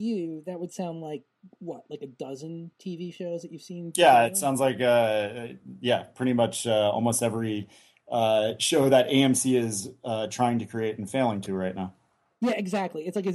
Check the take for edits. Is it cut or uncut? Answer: uncut